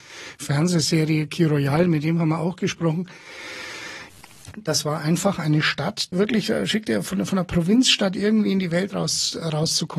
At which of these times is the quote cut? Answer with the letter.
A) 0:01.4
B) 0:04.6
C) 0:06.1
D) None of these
C